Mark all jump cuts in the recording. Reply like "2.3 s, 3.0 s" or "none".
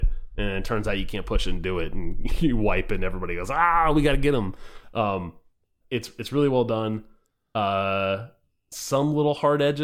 5.8 s